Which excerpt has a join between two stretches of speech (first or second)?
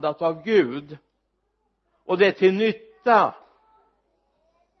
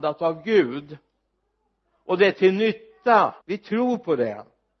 second